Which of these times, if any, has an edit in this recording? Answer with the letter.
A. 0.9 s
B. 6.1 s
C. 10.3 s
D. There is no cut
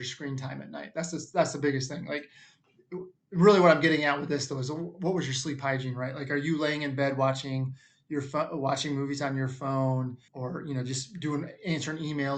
C